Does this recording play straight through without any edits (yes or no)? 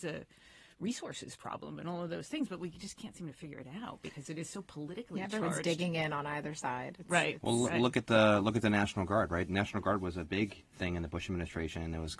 no